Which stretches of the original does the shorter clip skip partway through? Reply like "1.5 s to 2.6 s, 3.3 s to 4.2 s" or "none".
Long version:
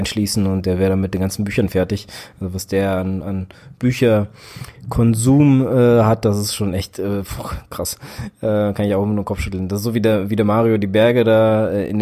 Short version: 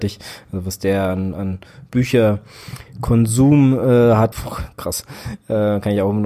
6.2 s to 7.3 s